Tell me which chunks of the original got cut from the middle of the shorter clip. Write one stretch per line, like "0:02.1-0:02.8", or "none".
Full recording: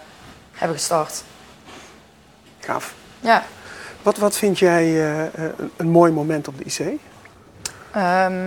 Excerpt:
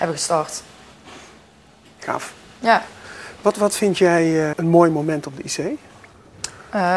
0:05.1-0:05.7